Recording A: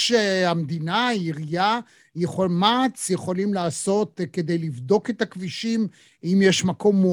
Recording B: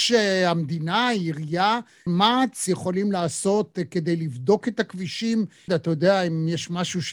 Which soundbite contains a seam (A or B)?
B